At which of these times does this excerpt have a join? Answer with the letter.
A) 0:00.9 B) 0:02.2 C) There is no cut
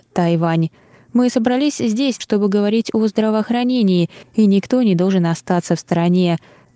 B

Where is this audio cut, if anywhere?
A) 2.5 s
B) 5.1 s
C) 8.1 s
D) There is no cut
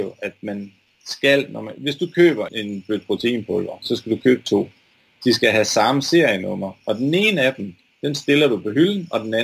A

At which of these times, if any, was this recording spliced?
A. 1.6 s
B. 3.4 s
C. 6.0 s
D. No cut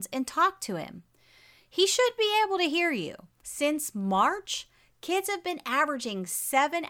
B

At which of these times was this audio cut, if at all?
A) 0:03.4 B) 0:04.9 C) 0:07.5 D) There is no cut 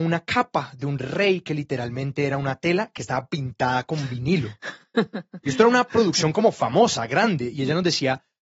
D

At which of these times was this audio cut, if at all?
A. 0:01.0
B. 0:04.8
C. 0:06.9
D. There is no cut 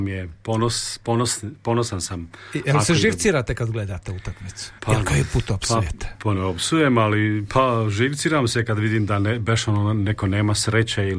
B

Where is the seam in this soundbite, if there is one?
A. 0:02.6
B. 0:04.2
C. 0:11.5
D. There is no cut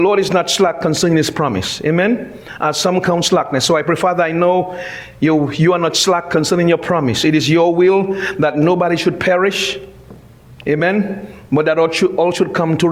D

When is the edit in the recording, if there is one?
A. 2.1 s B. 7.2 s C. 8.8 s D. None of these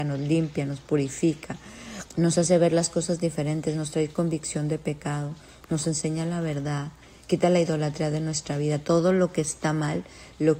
A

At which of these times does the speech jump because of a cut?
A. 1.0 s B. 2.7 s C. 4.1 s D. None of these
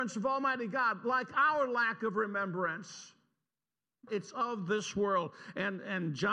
C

